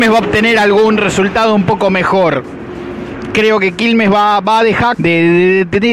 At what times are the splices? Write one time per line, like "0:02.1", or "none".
0:04.9